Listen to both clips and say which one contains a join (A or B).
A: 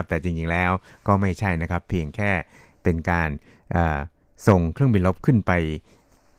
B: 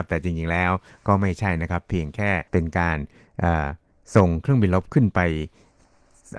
B